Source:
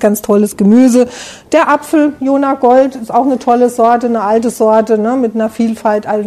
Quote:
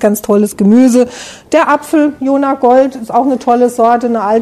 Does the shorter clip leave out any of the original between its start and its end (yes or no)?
no